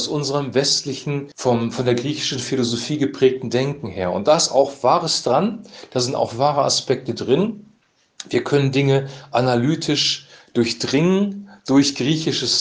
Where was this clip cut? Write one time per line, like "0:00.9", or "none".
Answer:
0:01.3